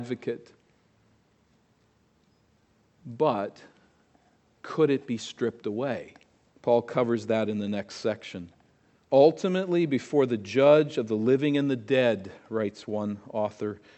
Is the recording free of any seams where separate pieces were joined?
no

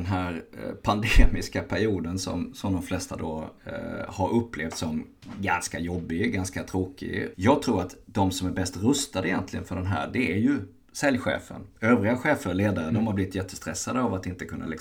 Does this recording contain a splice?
yes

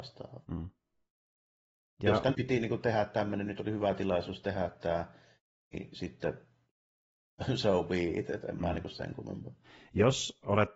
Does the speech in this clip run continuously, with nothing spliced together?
no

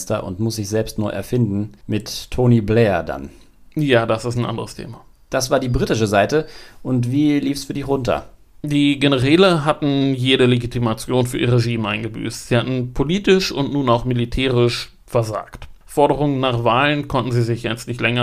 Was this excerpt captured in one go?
yes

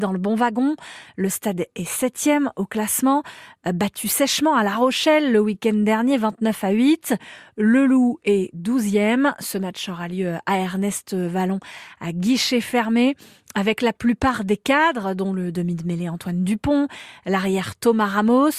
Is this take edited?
no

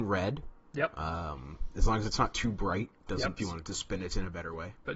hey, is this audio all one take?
no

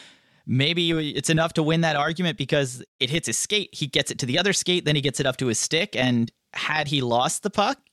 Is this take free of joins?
yes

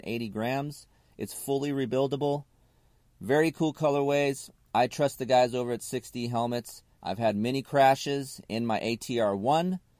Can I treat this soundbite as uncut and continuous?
no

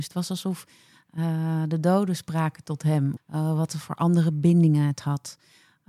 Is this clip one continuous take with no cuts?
no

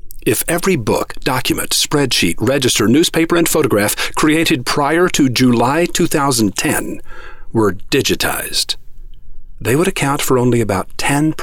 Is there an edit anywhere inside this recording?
no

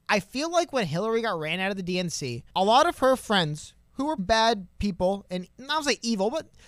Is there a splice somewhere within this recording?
yes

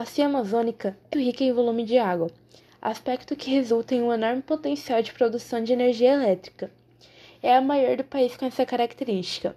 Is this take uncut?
no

